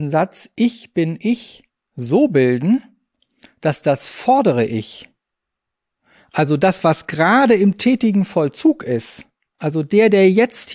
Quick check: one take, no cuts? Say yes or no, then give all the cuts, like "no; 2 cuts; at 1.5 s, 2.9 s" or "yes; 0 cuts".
yes; 0 cuts